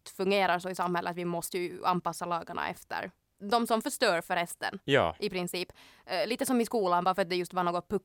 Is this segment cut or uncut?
uncut